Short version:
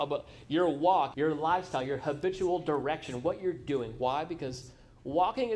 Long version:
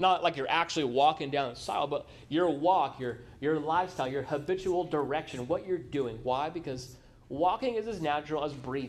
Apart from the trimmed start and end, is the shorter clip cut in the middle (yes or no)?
yes